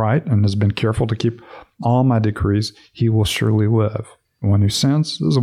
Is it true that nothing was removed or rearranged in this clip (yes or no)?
yes